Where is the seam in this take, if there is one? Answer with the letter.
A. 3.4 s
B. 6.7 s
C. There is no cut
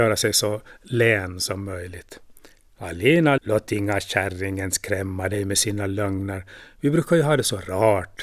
A